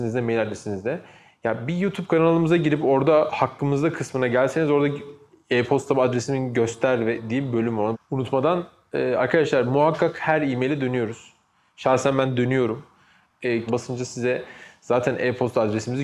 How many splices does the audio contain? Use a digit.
2